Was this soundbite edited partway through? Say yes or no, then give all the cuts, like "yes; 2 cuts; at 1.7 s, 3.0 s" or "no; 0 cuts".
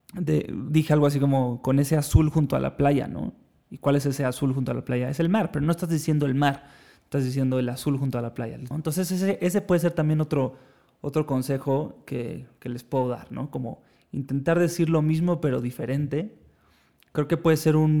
yes; 1 cut; at 8.7 s